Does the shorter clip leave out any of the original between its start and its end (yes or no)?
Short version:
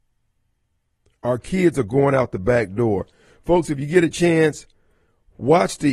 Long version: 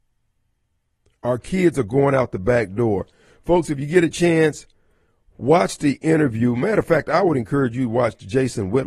no